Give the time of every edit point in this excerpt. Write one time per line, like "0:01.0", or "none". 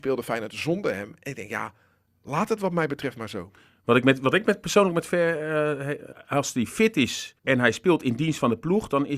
0:06.1
0:07.4